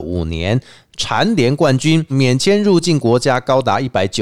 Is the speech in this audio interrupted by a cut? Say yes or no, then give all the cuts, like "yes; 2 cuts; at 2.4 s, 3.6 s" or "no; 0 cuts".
yes; 1 cut; at 2.1 s